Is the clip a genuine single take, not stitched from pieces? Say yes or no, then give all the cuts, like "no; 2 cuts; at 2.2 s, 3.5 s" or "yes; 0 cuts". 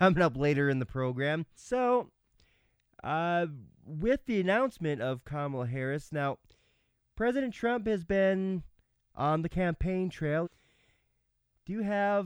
no; 2 cuts; at 1.6 s, 10.4 s